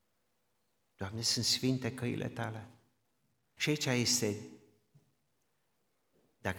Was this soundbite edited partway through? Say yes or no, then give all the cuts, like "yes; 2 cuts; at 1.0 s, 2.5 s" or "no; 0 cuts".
yes; 1 cut; at 3.6 s